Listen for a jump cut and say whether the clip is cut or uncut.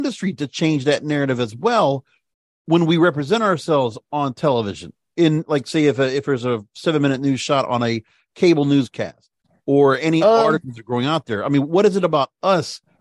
uncut